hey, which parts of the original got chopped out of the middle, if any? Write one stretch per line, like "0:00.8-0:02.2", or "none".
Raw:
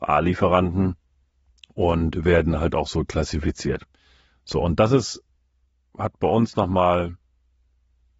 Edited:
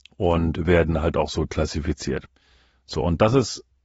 none